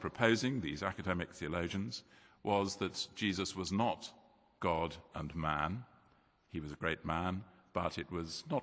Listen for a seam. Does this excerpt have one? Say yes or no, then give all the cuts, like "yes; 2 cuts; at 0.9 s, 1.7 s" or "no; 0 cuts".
no; 0 cuts